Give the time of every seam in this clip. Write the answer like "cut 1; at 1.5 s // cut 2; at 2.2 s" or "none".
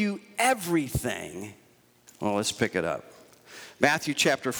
cut 1; at 2.1 s

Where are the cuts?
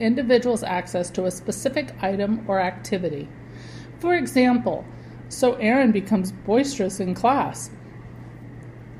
cut 1; at 5.2 s

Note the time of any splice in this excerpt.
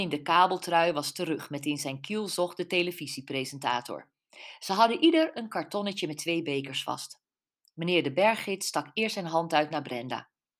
none

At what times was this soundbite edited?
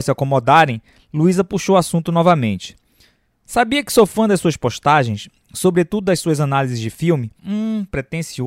cut 1; at 7.4 s

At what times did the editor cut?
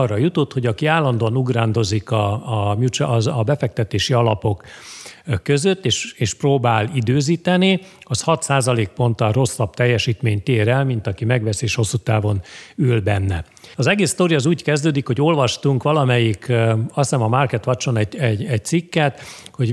cut 1; at 13.7 s

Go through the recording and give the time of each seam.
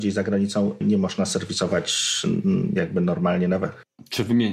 none

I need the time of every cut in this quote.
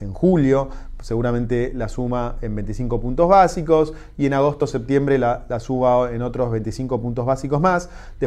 none

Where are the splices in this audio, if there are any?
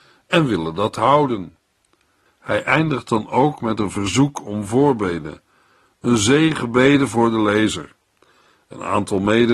cut 1; at 2.3 s

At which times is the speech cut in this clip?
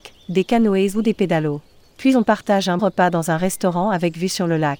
cut 1; at 2.8 s

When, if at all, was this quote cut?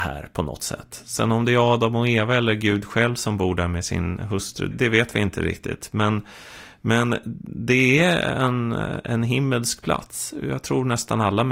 cut 1; at 4.7 s

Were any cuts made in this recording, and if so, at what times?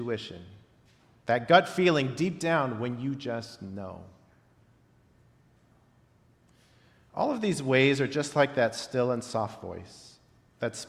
none

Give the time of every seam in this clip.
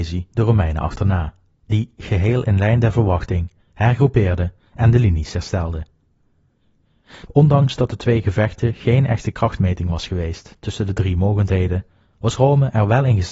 cut 1; at 3.6 s // cut 2; at 7.3 s

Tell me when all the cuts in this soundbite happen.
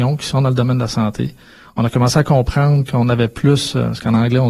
none

